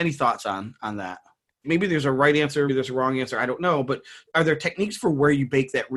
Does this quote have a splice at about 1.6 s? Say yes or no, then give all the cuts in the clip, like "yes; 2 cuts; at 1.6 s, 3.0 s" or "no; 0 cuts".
yes; 2 cuts; at 1.6 s, 2.7 s